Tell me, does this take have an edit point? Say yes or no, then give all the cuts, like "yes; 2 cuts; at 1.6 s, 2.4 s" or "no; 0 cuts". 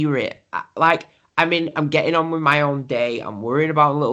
no; 0 cuts